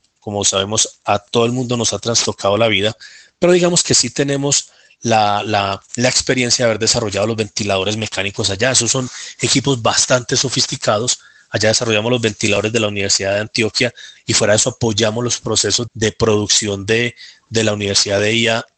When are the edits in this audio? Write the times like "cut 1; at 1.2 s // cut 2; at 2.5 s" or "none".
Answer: cut 1; at 15.9 s

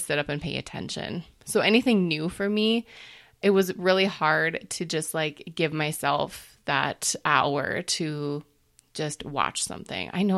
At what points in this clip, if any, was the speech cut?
none

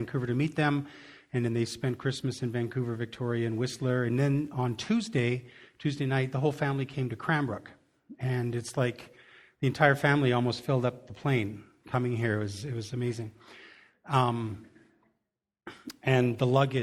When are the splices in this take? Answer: none

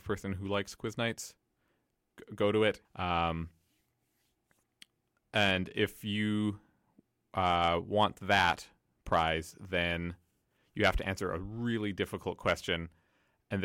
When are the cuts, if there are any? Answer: cut 1; at 2.8 s

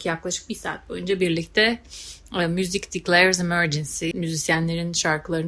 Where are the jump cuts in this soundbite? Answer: cut 1; at 4.1 s

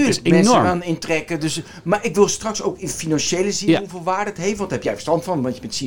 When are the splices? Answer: none

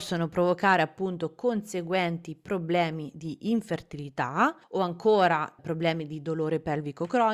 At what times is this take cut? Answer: cut 1; at 4.6 s

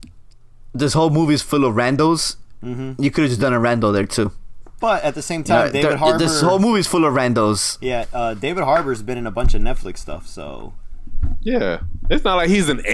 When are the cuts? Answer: cut 1; at 4.8 s

